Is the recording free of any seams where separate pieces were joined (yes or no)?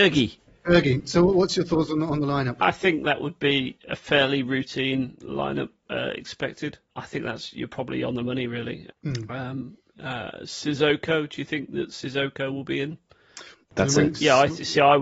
no